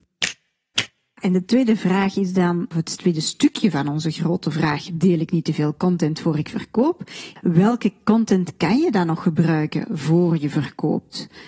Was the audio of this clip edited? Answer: no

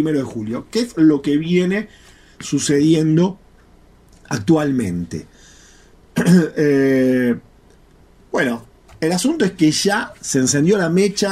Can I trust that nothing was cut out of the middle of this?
yes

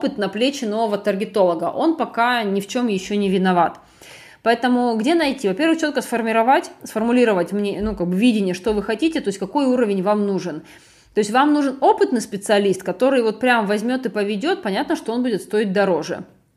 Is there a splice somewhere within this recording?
no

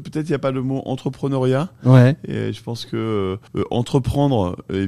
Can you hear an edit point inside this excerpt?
yes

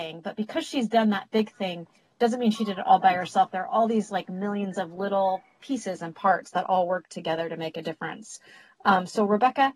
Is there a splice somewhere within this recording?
no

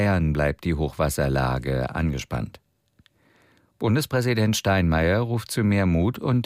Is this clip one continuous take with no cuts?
yes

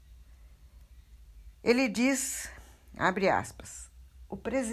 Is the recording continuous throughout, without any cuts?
no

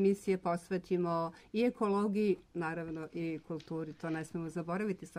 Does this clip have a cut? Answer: no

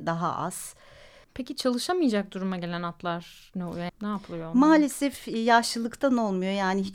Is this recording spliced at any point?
yes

